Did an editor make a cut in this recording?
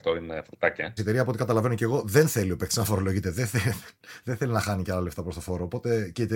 yes; 1 cut; at 1.0 s

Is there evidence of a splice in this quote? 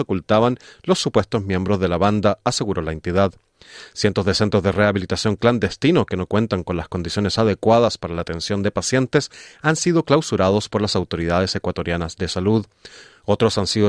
no; 0 cuts

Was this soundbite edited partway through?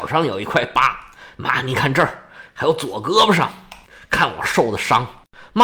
no; 0 cuts

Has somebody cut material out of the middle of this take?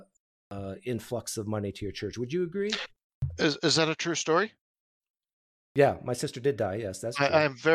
no; 0 cuts

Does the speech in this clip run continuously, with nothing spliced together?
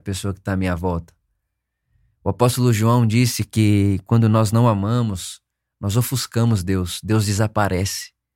yes; 0 cuts

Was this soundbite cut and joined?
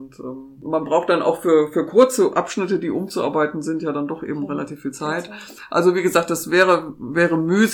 no; 0 cuts

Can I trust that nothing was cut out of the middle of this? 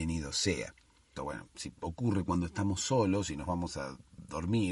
no; 1 cut; at 1.2 s

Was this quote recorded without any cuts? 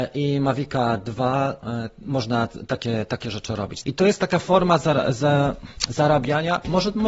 no; 1 cut; at 3.8 s

